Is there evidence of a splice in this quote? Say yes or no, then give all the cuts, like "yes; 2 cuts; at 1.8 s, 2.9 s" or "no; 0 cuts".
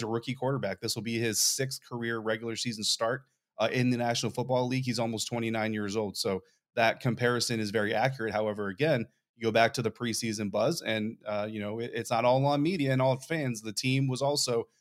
no; 0 cuts